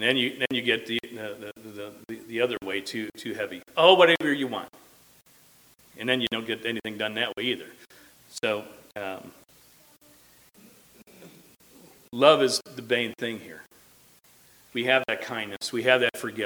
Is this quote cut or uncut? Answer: cut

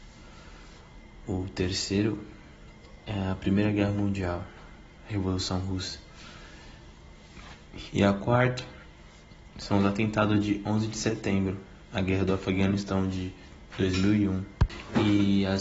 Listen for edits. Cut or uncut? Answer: uncut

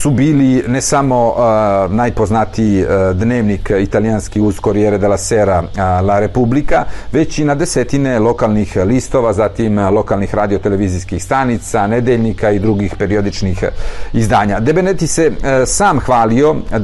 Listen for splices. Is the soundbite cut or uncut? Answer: uncut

